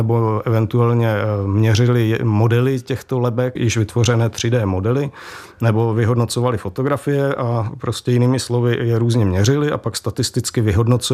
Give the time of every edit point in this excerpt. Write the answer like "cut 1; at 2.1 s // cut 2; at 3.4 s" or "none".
cut 1; at 3.6 s